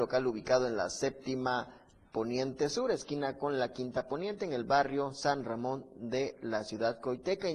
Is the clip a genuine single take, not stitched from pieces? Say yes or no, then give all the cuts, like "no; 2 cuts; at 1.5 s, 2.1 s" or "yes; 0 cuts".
yes; 0 cuts